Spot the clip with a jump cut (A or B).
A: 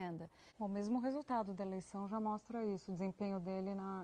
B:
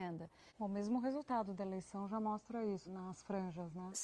B